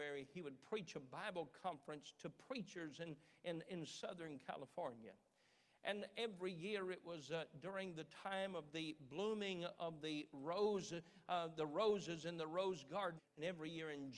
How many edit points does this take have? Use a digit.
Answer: 1